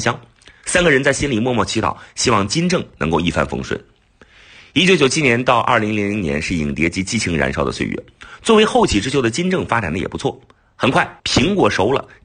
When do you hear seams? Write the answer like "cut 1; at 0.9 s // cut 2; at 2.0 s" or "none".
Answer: cut 1; at 11.2 s